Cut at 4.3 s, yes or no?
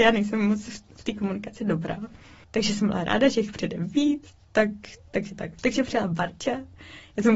yes